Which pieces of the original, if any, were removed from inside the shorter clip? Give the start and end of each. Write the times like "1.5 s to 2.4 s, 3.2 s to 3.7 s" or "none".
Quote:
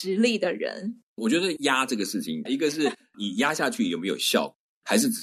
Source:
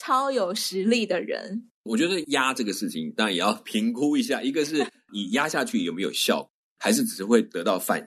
3.1 s to 4.4 s